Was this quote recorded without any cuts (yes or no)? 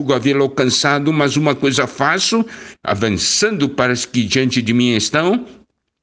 no